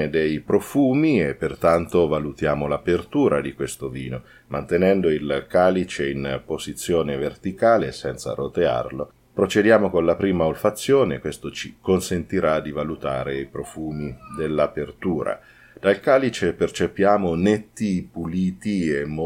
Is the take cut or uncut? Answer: uncut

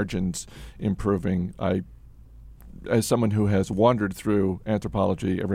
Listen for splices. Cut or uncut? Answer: uncut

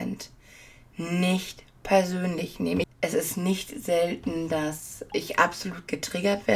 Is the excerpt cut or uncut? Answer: cut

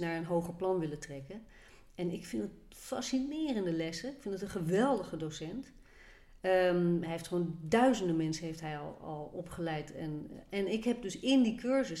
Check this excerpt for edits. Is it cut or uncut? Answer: uncut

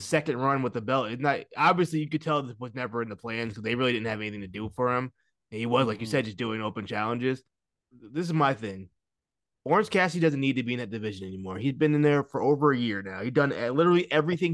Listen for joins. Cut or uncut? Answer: cut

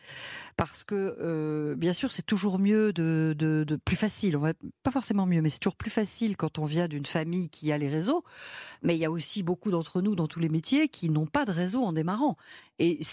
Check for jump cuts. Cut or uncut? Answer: uncut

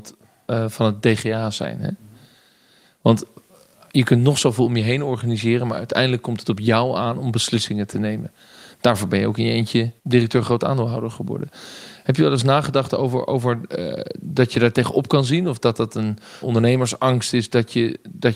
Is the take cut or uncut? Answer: cut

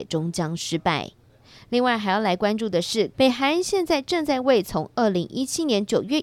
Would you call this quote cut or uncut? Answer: cut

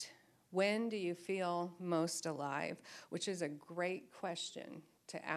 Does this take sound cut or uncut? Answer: uncut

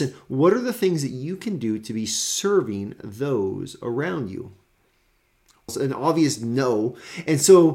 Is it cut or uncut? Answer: cut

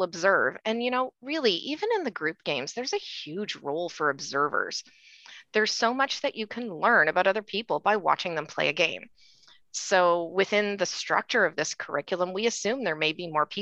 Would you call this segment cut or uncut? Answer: uncut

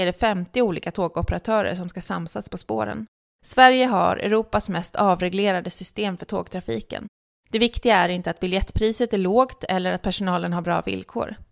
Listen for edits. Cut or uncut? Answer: uncut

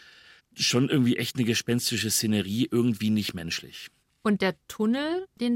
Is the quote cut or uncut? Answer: uncut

